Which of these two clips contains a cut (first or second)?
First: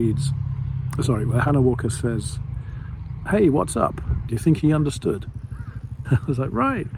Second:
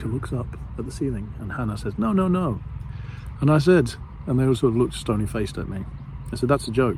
first